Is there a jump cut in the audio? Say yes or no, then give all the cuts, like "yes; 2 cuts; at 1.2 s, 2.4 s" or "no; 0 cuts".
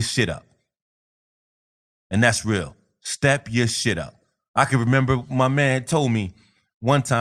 yes; 1 cut; at 4.5 s